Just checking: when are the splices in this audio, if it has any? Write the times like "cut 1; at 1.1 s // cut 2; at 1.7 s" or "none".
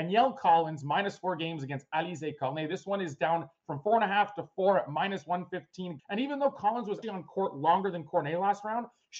cut 1; at 6.0 s // cut 2; at 7.0 s